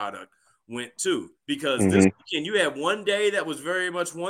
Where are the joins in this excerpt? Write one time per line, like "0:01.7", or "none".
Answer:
0:01.4